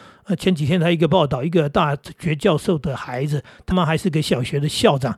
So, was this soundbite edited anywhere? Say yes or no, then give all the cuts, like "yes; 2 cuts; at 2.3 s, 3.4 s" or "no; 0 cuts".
yes; 1 cut; at 3.7 s